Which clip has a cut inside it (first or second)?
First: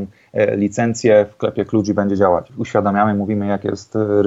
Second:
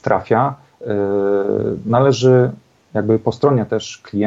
first